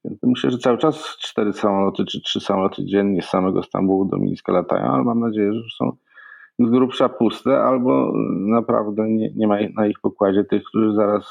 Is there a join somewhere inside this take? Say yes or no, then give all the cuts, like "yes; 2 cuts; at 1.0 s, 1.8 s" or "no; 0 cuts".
yes; 1 cut; at 9.3 s